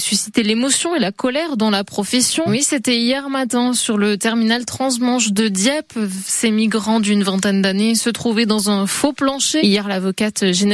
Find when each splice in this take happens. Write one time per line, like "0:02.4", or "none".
0:02.5
0:09.6